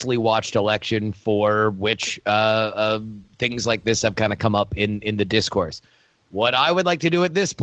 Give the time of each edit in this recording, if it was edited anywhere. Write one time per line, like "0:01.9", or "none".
none

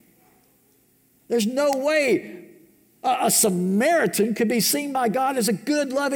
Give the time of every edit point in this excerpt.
none

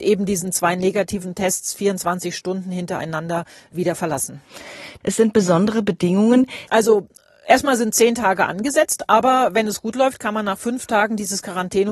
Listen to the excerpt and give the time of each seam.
0:05.0
0:06.7

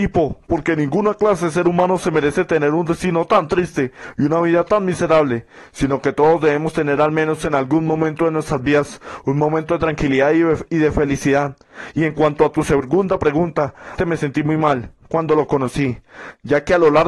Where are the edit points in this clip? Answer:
0:14.0

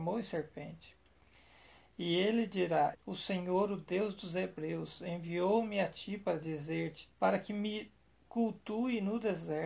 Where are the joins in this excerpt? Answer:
0:02.9
0:07.1

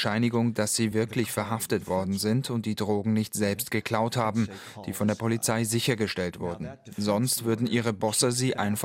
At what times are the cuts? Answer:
none

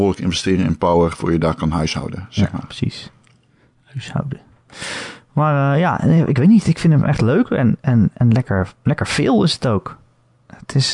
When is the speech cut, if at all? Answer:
none

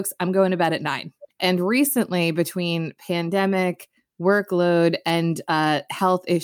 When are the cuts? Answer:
0:01.3

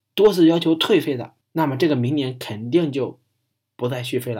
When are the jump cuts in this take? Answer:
0:01.4

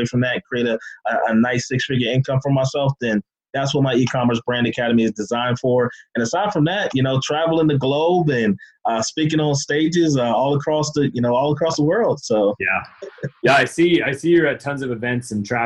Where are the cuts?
none

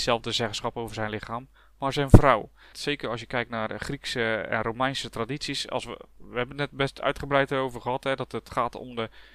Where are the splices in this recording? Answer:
0:02.7

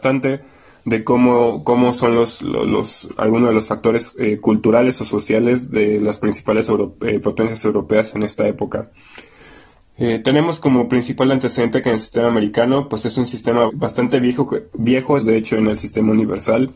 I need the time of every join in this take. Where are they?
0:13.7
0:15.2

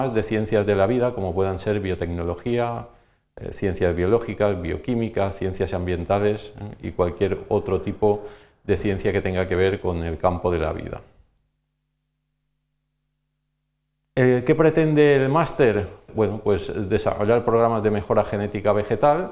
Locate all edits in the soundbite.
0:16.1

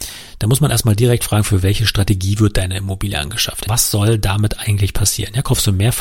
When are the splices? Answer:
0:03.7

